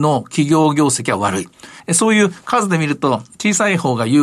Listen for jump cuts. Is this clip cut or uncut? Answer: cut